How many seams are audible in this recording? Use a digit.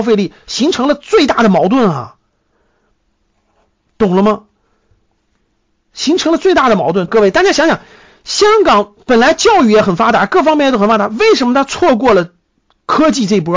1